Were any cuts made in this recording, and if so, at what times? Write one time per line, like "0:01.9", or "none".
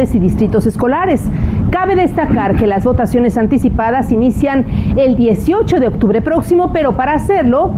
none